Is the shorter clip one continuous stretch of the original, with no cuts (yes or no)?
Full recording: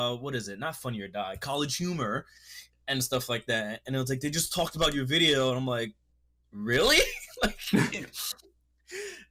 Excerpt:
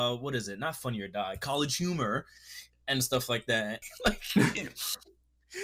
no